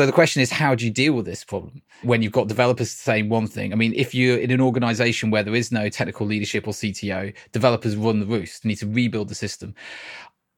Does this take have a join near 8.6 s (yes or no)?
yes